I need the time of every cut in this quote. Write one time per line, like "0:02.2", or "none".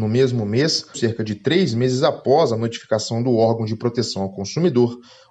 0:00.9